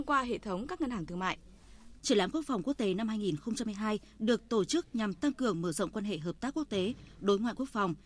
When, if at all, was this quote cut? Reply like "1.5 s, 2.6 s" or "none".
2.0 s